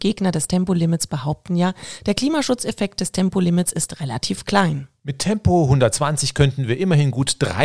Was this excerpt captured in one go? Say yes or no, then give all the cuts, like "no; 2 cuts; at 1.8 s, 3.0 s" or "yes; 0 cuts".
yes; 0 cuts